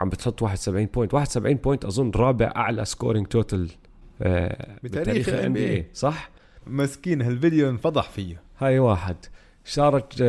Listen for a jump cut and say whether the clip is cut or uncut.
cut